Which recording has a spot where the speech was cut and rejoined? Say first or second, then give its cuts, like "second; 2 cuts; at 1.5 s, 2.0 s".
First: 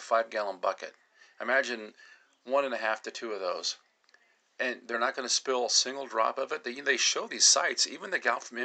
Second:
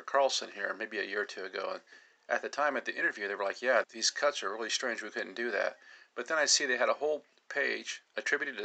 second; 1 cut; at 3.8 s